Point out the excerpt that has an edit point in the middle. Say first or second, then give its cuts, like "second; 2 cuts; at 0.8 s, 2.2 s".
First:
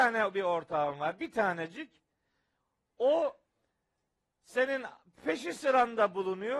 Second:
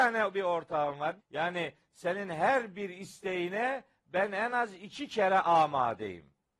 second; 1 cut; at 1.2 s